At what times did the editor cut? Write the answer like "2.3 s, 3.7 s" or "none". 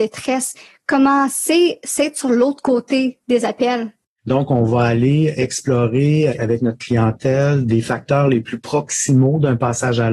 4.2 s, 6.3 s